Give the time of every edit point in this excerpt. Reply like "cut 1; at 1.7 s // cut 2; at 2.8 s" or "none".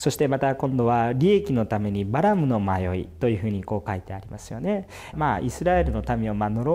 cut 1; at 5.1 s